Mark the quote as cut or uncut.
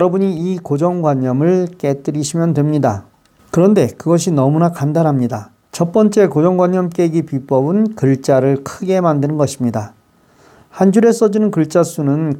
cut